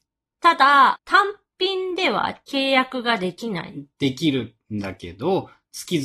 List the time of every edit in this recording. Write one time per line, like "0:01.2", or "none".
0:01.0